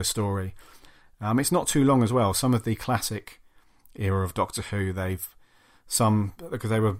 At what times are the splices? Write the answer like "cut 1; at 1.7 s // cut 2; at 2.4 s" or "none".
none